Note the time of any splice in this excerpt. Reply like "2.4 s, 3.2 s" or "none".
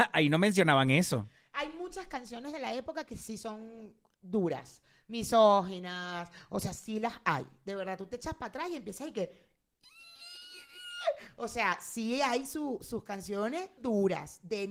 13.8 s

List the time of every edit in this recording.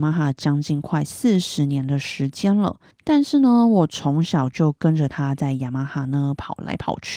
2.9 s

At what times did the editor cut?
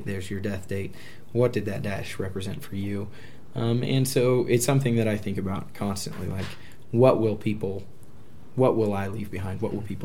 none

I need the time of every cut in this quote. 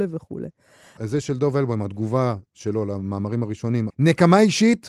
1.0 s, 3.9 s

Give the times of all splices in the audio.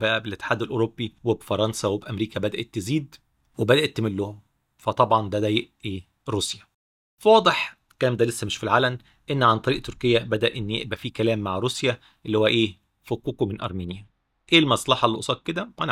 1.2 s

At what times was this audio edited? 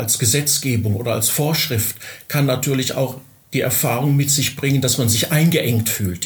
none

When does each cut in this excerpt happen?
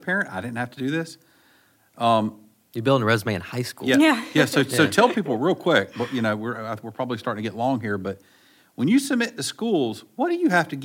none

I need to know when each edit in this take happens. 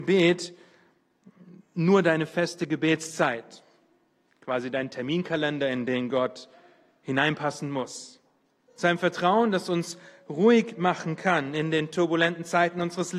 8.7 s

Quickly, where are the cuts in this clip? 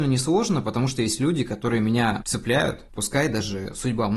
2.9 s

